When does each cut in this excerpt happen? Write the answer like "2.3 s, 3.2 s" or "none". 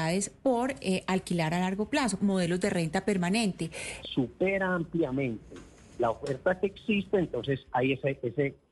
2.2 s, 4.0 s